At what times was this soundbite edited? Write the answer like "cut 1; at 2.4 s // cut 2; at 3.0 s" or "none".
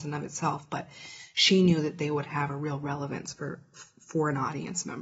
none